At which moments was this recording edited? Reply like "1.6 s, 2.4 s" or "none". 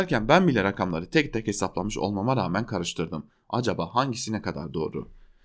none